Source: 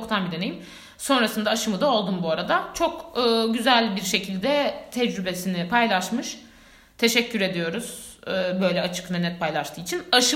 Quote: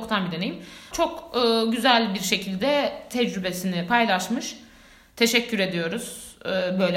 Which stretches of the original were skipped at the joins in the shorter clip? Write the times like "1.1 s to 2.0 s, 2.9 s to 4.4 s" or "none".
0.9 s to 2.7 s